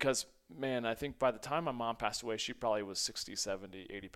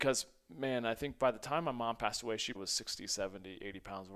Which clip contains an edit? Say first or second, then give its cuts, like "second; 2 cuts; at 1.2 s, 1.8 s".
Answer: second; 1 cut; at 2.5 s